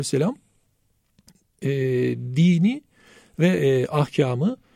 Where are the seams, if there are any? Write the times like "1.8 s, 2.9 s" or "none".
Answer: none